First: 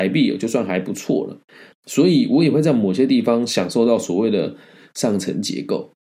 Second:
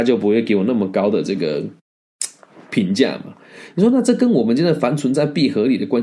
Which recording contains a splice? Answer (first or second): first